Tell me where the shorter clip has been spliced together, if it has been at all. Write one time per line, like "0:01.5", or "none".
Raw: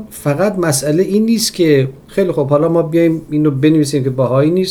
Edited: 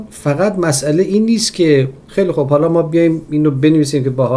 none